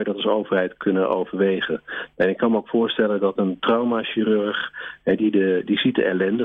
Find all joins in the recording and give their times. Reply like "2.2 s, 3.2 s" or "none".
none